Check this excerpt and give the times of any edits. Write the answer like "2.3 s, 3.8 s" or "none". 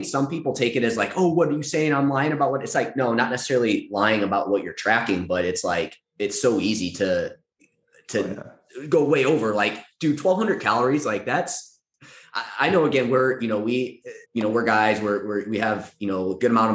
14.2 s